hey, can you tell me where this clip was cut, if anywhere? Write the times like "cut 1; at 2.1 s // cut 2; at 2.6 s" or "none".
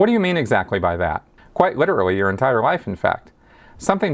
cut 1; at 1.4 s